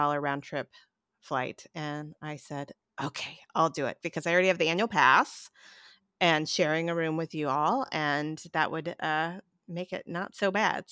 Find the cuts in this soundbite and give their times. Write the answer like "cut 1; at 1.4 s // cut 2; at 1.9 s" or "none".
none